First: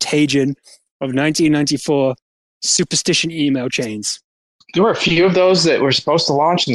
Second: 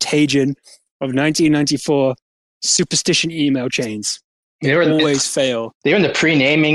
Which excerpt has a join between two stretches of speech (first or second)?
second